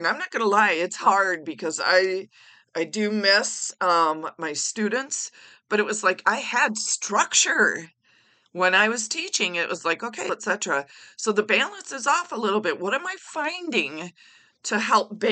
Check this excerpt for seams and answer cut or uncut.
cut